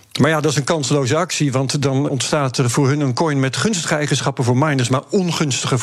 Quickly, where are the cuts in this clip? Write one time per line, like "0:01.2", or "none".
0:02.1